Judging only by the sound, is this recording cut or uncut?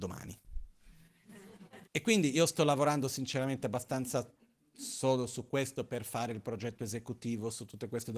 cut